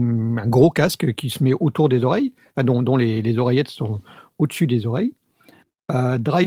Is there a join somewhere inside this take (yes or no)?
no